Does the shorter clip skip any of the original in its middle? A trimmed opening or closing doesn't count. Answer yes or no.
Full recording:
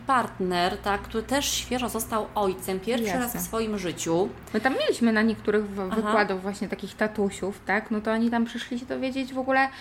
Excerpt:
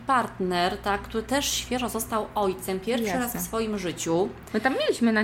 no